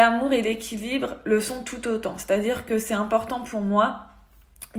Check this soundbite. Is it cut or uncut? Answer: uncut